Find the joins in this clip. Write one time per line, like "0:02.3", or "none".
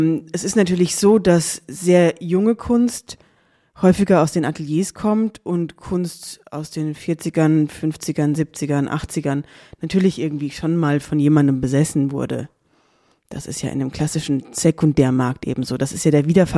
0:08.4

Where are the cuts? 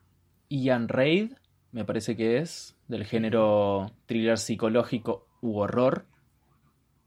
none

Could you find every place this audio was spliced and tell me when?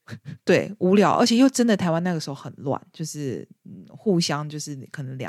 none

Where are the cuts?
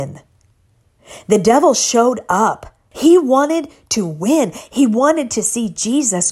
0:02.9

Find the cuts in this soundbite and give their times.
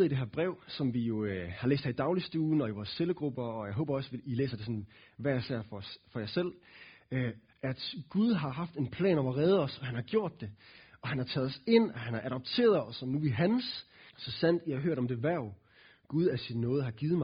0:07.5
0:14.1

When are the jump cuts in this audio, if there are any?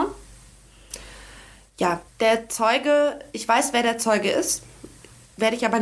0:02.1

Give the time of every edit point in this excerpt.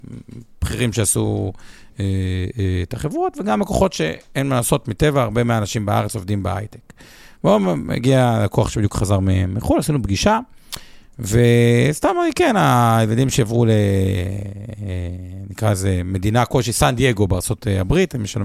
none

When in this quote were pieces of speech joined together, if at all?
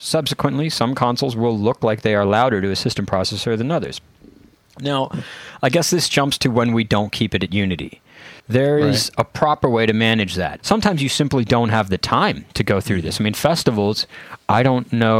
0:08.4
0:10.6
0:12.5

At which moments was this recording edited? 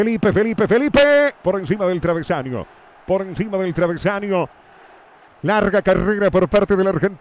0:01.3
0:05.3

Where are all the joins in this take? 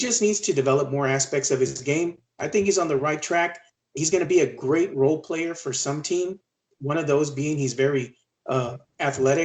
0:06.7

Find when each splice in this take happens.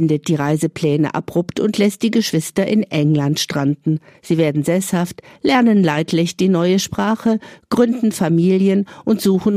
0:04.1

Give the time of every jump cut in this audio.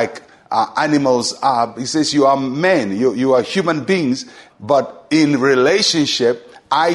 0:04.5

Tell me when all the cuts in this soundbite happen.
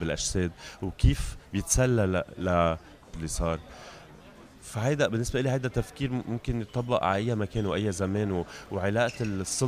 0:03.1

